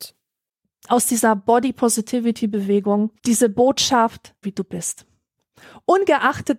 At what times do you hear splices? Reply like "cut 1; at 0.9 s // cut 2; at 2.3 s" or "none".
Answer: cut 1; at 3.2 s // cut 2; at 4.4 s

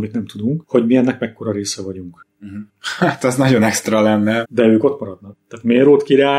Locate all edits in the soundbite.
cut 1; at 2.7 s // cut 2; at 4.4 s

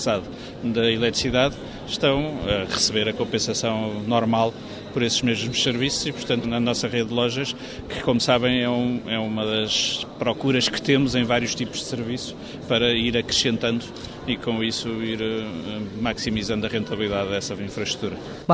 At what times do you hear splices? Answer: cut 1; at 6.4 s

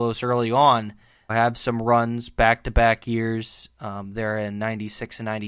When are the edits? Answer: cut 1; at 1.3 s

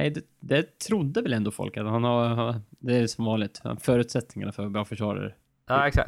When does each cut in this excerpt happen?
none

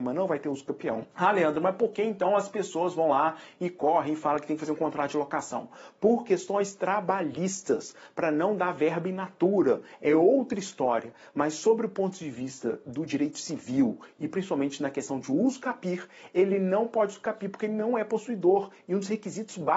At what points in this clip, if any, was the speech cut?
cut 1; at 1.1 s

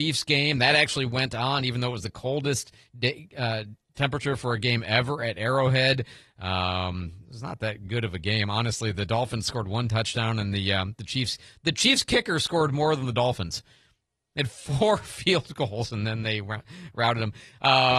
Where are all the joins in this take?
none

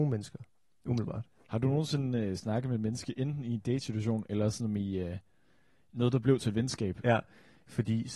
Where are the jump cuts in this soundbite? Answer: cut 1; at 7.0 s

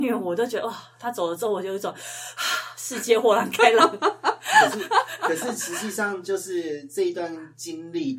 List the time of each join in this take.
none

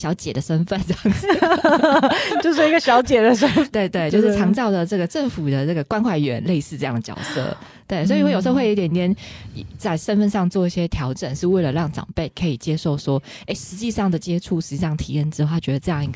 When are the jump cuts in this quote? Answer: cut 1; at 3.7 s

